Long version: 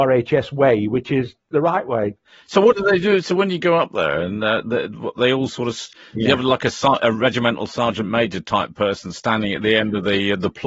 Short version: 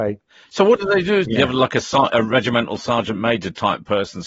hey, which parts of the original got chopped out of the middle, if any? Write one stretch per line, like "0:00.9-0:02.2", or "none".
0:03.2-0:06.1